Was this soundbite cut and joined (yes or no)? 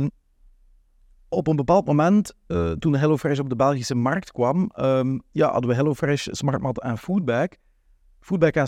no